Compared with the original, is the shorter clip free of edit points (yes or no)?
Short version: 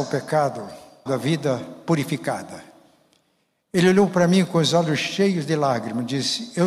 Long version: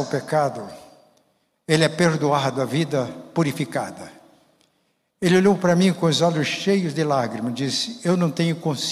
no